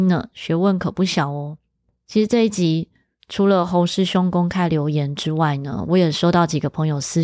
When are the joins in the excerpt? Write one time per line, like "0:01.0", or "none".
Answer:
none

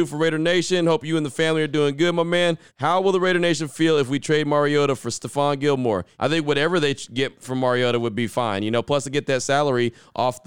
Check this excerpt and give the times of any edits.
0:02.7
0:06.1

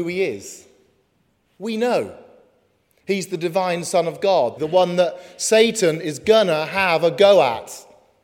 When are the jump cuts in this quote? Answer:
0:04.6

